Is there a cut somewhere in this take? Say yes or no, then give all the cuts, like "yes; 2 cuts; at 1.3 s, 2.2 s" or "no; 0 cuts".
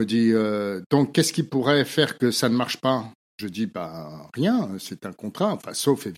no; 0 cuts